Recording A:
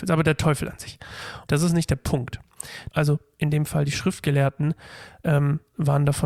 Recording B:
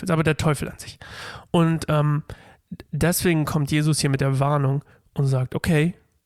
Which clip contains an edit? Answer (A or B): A